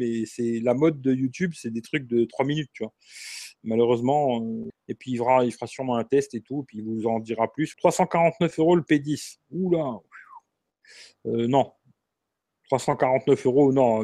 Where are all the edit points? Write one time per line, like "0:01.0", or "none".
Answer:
0:04.7
0:07.7